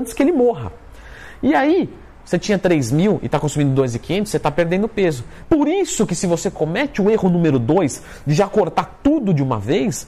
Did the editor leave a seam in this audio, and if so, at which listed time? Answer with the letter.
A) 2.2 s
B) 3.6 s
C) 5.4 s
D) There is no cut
C